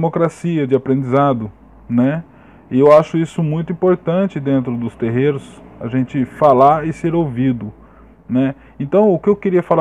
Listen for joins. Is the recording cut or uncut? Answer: uncut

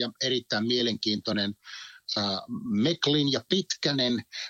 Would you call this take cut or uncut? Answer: uncut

